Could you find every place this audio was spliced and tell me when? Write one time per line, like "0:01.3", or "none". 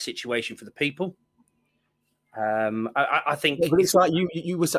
none